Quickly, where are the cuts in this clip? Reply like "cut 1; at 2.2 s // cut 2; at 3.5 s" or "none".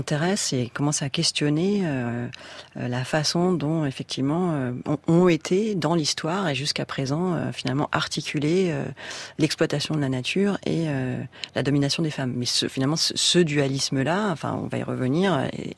none